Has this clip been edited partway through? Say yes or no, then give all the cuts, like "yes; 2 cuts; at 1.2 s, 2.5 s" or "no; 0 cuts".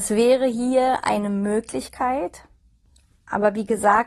no; 0 cuts